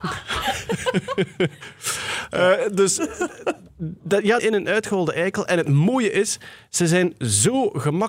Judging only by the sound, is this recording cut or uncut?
cut